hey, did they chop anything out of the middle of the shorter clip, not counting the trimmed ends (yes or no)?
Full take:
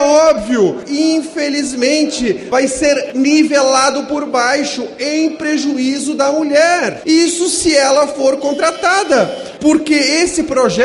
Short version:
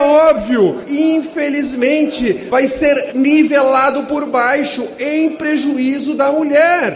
no